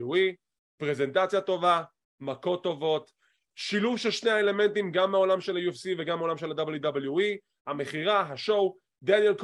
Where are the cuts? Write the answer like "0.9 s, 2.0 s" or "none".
none